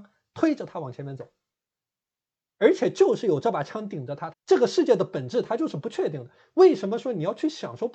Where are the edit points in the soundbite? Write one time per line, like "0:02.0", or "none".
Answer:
0:04.3